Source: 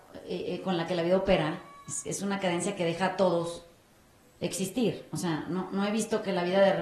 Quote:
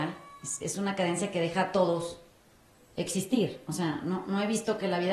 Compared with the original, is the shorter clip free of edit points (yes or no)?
yes